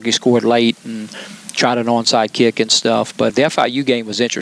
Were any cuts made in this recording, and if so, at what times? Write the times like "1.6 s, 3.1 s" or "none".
3.3 s